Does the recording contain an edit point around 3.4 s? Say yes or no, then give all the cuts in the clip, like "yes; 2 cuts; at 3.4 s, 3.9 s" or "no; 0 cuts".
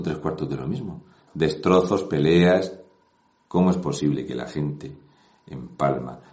yes; 1 cut; at 3.4 s